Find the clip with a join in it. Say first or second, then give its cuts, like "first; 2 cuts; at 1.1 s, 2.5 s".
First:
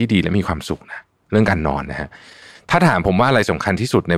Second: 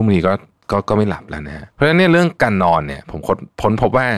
second; 1 cut; at 1.7 s